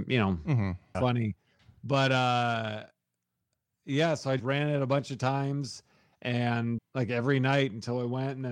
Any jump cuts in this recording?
yes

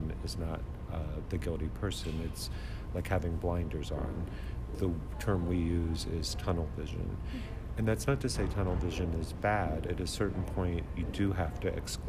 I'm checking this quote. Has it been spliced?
no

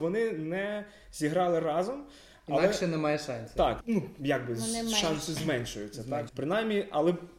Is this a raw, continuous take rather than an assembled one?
no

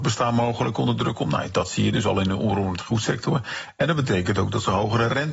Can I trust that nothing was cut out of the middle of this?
yes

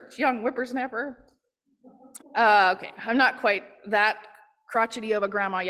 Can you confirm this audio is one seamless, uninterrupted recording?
no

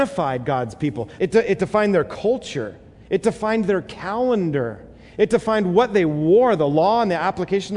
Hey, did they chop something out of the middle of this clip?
yes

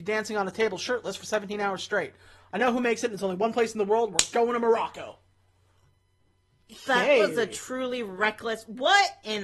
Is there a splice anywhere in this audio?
no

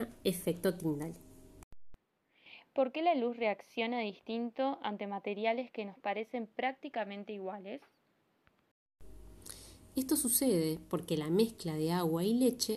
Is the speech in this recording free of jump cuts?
yes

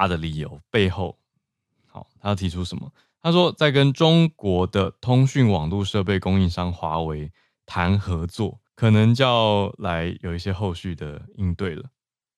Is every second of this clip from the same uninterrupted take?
no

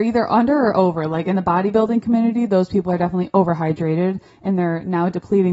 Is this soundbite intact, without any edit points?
yes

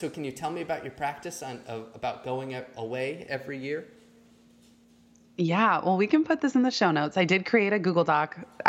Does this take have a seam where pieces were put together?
no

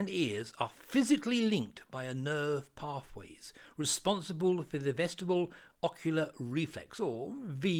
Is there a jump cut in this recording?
no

